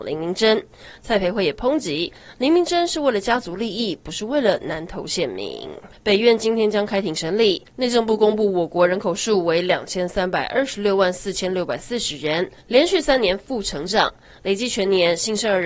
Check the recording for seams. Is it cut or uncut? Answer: cut